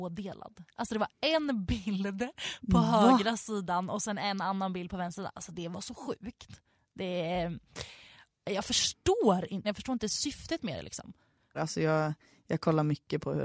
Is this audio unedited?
no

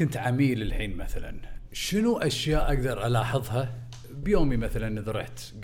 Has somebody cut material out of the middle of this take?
yes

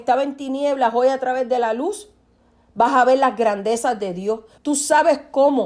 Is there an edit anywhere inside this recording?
yes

